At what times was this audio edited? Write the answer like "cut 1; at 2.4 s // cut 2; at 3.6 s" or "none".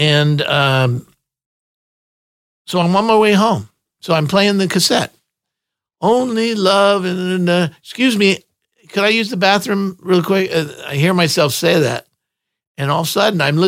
none